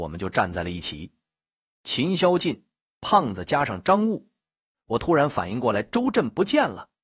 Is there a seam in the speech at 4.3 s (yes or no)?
no